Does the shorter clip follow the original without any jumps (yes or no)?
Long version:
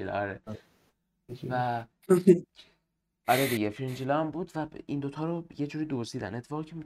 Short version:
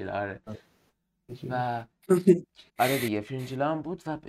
no